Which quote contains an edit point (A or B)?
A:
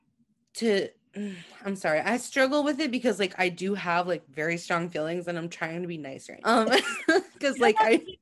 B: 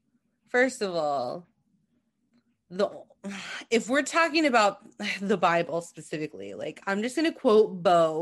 A